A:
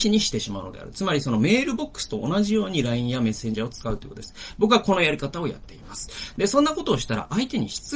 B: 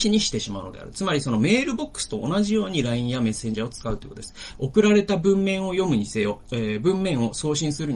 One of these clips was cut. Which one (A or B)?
B